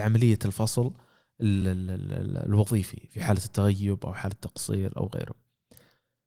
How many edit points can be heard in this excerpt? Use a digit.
0